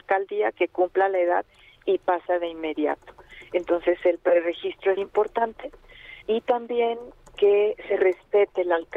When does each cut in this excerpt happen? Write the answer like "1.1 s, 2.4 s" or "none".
5.0 s, 6.2 s